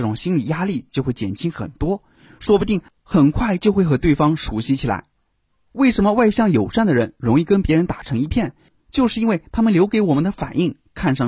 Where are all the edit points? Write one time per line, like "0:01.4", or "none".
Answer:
none